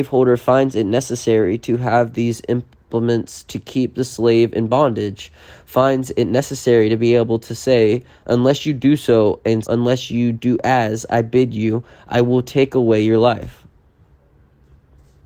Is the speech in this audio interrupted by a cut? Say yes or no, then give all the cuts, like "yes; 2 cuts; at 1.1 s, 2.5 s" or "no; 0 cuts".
yes; 1 cut; at 9.6 s